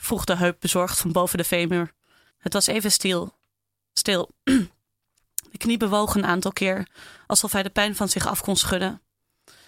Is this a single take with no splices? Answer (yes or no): no